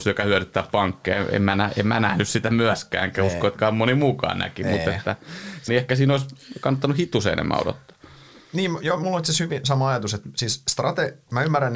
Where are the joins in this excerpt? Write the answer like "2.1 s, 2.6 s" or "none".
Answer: 5.7 s